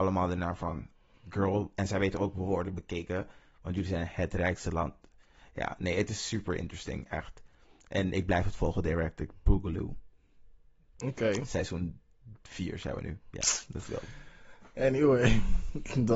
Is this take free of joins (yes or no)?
yes